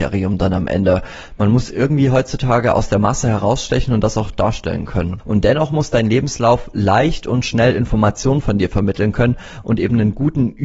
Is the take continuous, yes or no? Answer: no